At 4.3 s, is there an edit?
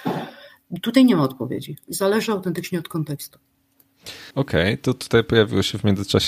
yes; 1 cut; at 4.3 s

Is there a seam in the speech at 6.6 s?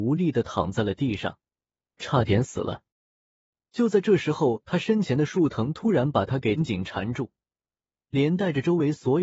yes; 2 cuts; at 1.9 s, 6.6 s

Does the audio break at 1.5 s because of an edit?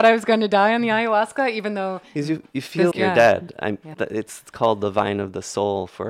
no; 2 cuts; at 2.9 s, 3.9 s

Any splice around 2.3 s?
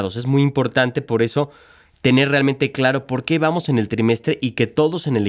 no; 0 cuts

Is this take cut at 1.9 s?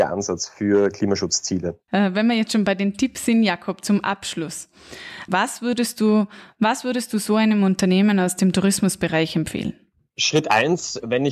yes; 2 cuts; at 1.9 s, 5.3 s

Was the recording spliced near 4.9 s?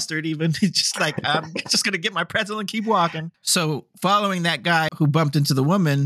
yes; 2 cuts; at 3.3 s, 4.9 s

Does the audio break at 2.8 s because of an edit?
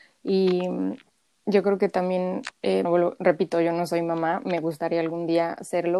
yes; 1 cut; at 2.8 s

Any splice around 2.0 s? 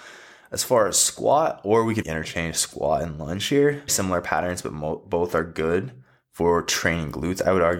yes; 2 cuts; at 2.0 s, 3.9 s

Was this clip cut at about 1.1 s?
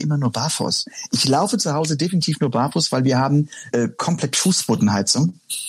no; 1 cut; at 3.7 s

